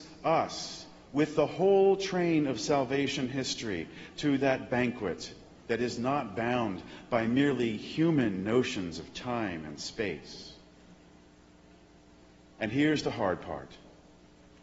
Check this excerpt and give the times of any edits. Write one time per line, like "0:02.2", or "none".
none